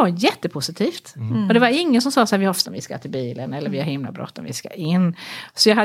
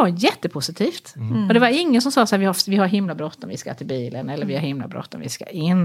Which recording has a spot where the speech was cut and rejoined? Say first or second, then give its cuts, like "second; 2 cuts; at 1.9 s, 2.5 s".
first; 1 cut; at 2.7 s